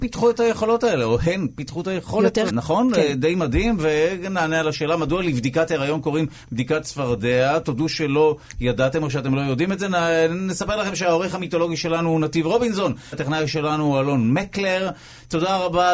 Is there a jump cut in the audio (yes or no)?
yes